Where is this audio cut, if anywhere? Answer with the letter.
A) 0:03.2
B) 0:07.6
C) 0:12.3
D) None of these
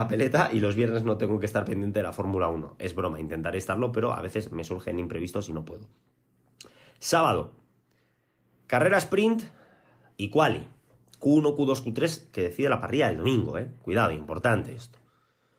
D